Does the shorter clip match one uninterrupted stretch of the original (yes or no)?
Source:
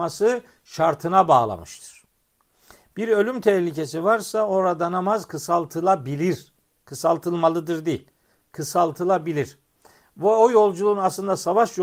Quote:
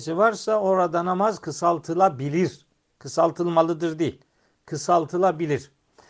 yes